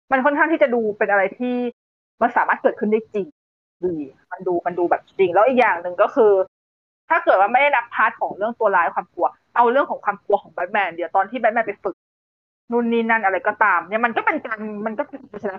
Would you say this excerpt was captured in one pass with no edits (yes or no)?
yes